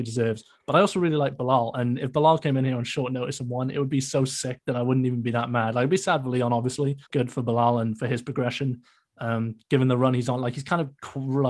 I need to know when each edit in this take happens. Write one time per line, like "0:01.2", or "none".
0:07.1

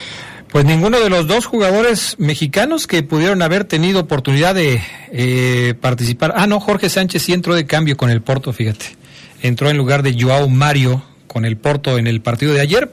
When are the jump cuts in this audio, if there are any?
none

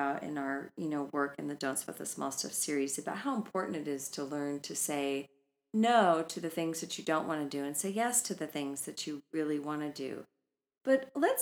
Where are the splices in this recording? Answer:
0:09.3

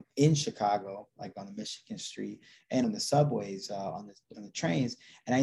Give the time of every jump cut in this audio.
0:02.8

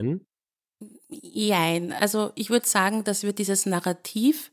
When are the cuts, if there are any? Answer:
none

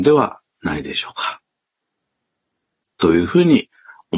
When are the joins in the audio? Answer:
0:02.9

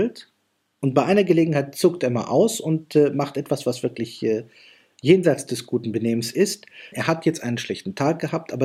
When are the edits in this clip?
0:06.9

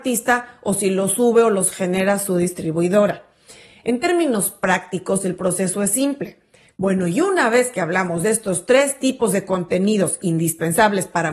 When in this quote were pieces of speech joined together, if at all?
0:06.7

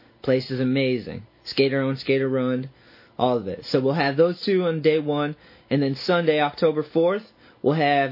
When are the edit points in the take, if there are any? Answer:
none

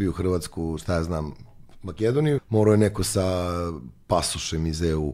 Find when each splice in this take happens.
0:02.4

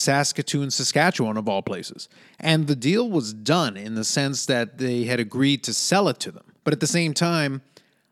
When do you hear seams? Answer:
0:06.6

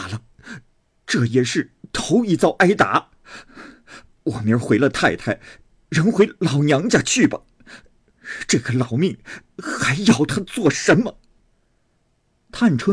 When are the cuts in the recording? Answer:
none

